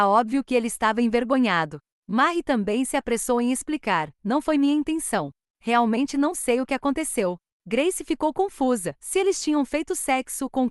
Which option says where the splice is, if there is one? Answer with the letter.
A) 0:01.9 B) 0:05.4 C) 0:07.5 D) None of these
D